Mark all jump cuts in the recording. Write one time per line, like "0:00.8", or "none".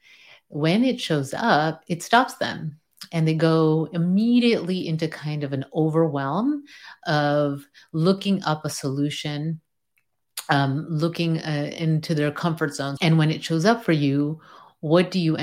0:13.0